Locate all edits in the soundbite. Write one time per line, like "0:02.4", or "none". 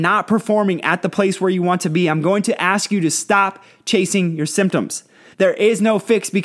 0:05.3